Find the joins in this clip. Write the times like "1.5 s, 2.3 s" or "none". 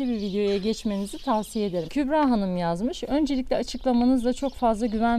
1.9 s